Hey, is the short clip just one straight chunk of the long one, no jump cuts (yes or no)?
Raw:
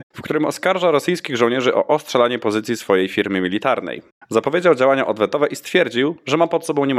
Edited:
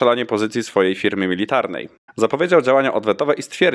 yes